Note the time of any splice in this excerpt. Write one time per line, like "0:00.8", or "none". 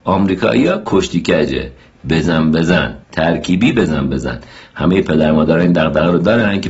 0:03.0